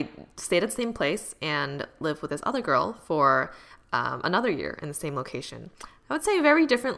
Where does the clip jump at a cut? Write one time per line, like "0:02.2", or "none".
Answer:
none

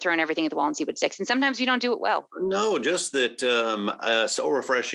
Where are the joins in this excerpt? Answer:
0:02.3

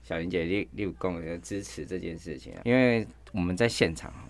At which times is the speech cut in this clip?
0:02.6

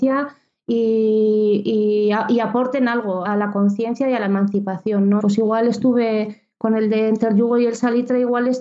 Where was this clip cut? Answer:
0:03.3
0:05.2

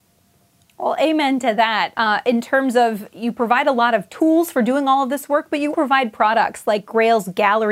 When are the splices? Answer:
0:01.9
0:05.7

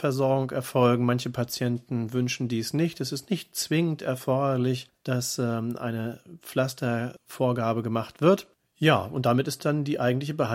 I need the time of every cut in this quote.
none

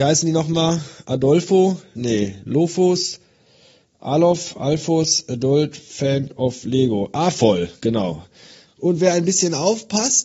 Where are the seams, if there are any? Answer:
0:01.9
0:08.7

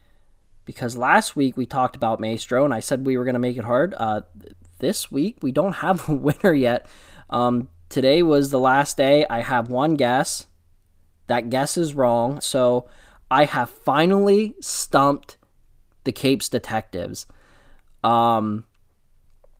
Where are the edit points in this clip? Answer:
0:12.4

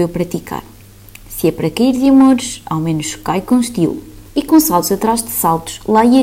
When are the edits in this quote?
0:04.3

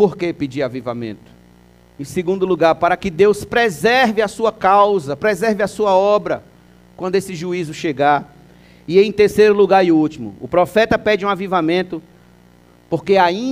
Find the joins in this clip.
0:02.0
0:05.2

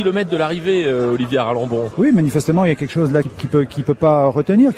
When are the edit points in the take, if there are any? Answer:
0:03.2

